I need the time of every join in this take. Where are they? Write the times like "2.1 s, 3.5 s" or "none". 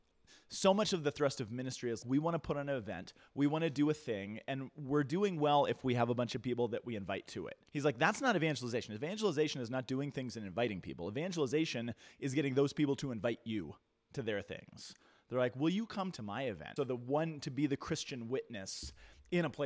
2.0 s, 7.7 s, 16.8 s